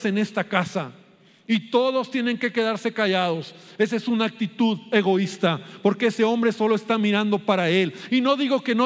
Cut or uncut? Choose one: uncut